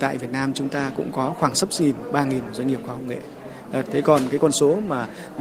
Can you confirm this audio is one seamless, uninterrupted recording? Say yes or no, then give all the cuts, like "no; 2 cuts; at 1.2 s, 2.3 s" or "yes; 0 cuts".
no; 1 cut; at 3.9 s